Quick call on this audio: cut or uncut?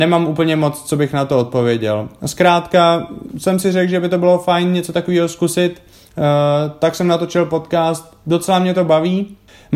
uncut